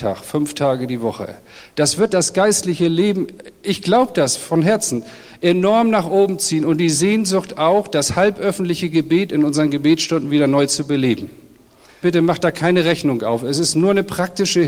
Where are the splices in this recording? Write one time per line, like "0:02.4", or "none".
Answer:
0:12.0